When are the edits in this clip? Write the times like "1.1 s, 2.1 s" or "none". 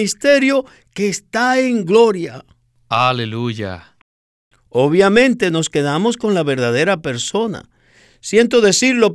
4.5 s